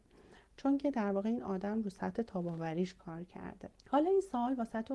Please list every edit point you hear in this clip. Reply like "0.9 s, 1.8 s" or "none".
3.8 s